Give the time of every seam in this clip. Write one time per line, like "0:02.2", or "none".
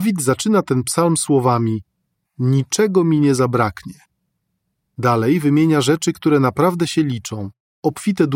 0:02.2